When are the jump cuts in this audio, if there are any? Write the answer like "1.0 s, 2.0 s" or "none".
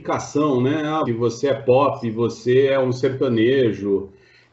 1.0 s